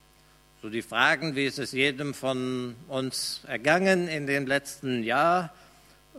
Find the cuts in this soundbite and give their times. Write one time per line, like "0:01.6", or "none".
none

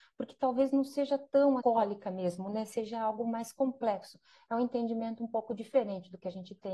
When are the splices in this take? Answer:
0:01.6

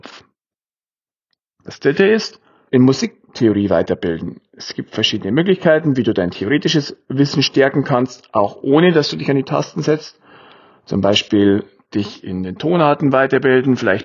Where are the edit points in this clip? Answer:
0:02.7

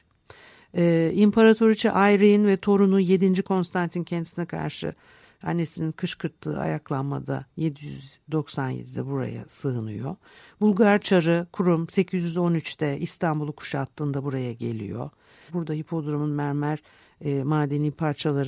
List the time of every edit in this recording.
0:03.4
0:15.5

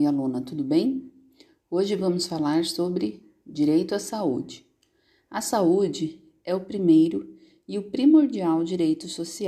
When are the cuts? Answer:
none

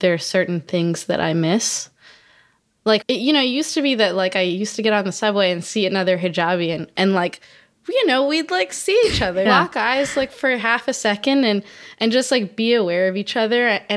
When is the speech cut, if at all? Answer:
0:03.0
0:09.5

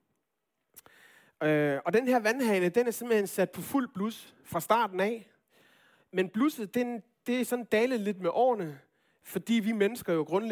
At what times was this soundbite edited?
none

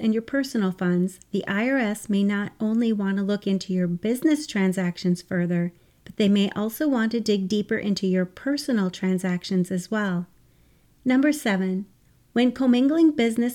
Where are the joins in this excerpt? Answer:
0:10.9

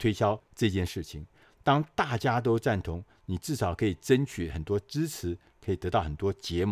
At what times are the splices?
none

